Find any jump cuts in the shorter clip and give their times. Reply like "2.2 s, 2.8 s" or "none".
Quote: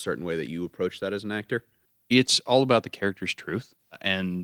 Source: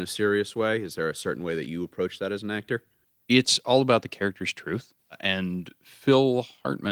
none